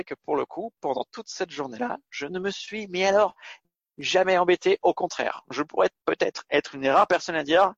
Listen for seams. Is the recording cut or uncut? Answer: uncut